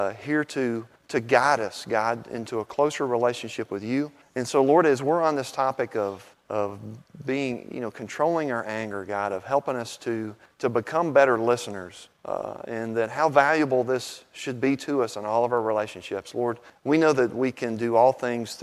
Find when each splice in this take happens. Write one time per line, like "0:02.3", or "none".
none

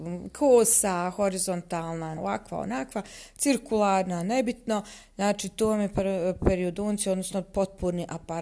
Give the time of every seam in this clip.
0:02.2

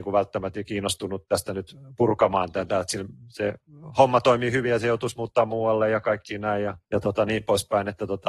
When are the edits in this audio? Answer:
0:06.8

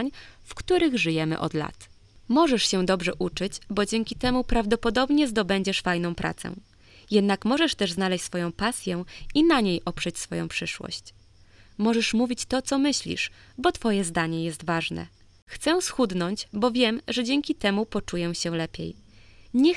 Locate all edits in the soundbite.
none

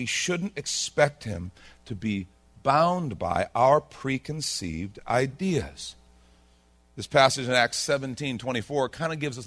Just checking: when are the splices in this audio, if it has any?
none

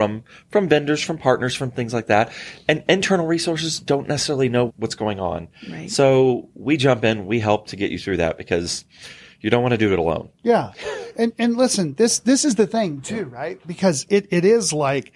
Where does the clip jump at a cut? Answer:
0:04.7

